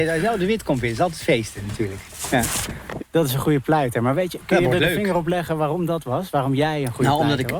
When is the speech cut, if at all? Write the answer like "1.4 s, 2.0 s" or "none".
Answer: 3.0 s

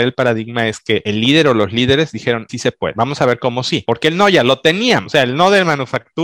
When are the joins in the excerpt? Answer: 2.5 s

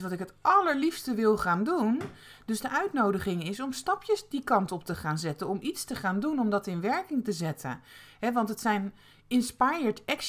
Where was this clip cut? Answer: none

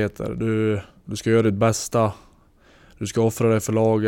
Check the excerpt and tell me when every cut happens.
1.0 s

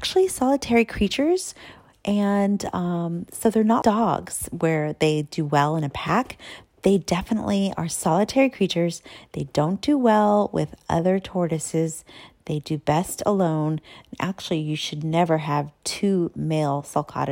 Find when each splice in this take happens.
3.8 s

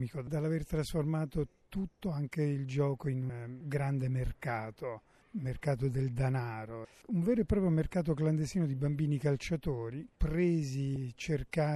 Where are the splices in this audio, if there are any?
10.1 s

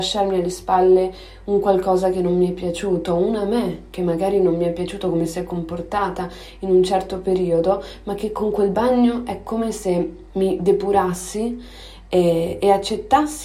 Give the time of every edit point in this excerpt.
10.3 s

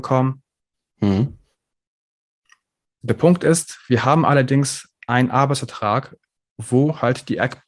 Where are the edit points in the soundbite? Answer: 0.9 s

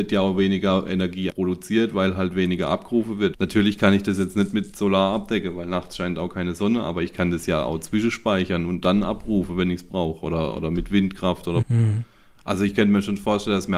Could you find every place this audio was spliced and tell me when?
1.3 s, 3.3 s, 11.6 s

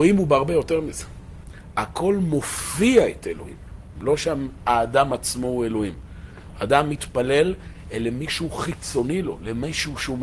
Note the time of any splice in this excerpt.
4.0 s

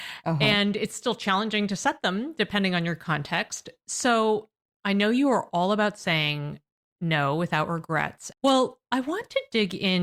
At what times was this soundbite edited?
8.3 s

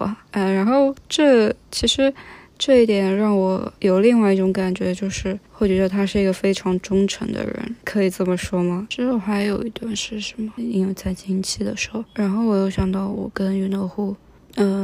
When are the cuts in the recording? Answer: 8.9 s, 10.6 s

